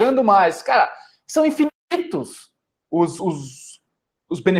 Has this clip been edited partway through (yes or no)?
no